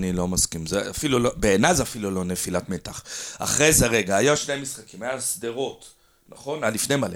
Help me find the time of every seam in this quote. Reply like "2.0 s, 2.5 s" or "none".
none